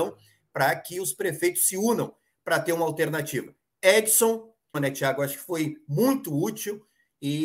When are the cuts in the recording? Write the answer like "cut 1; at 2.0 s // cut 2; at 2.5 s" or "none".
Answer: cut 1; at 4.7 s